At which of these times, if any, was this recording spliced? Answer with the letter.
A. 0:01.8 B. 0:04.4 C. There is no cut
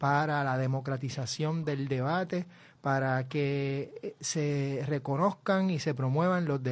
C